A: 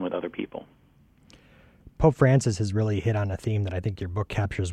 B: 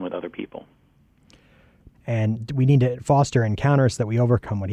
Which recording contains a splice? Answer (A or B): B